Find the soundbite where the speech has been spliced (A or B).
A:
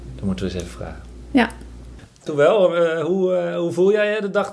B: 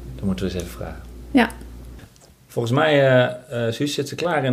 A